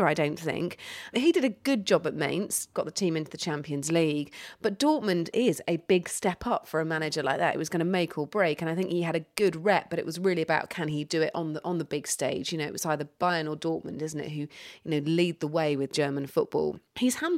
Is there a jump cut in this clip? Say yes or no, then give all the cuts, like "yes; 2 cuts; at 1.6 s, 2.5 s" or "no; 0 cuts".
no; 0 cuts